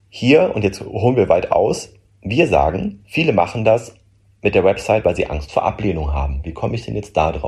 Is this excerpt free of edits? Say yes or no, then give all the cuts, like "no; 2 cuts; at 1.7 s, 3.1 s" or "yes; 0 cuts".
yes; 0 cuts